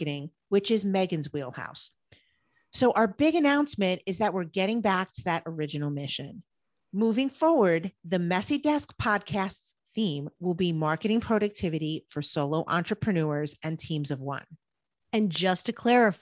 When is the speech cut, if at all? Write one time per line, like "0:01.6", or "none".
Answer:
none